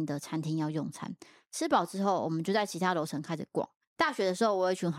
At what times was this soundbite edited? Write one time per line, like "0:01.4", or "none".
0:03.8